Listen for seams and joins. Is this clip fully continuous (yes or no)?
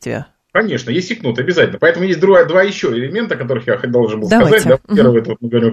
yes